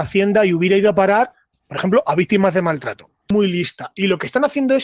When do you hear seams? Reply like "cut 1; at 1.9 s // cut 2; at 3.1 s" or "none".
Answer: none